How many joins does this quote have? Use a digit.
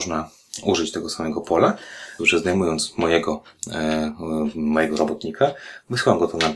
1